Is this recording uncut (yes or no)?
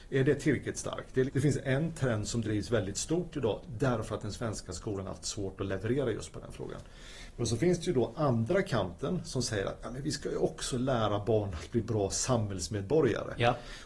no